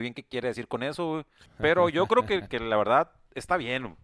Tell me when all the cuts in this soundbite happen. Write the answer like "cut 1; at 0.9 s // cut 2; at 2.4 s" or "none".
cut 1; at 1.4 s // cut 2; at 2.5 s